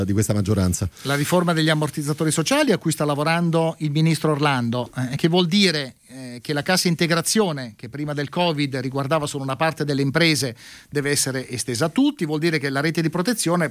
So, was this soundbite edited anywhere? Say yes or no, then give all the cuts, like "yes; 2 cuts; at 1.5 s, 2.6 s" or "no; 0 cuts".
no; 0 cuts